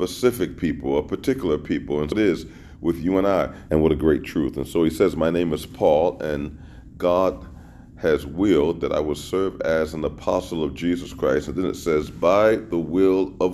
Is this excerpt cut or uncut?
cut